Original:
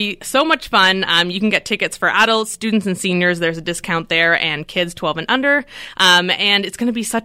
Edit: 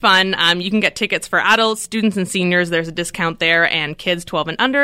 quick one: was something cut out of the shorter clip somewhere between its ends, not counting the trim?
no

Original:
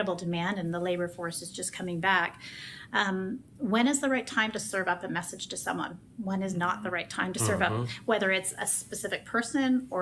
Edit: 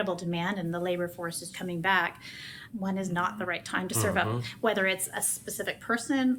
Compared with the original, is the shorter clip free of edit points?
no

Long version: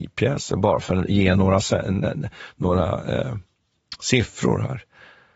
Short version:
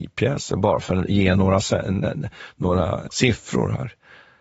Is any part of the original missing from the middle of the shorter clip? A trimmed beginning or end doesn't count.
yes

